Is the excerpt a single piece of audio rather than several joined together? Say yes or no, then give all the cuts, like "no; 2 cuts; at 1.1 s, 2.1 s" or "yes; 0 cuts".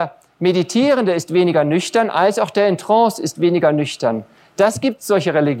yes; 0 cuts